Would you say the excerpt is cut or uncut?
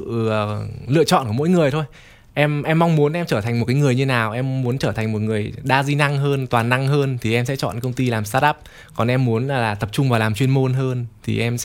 uncut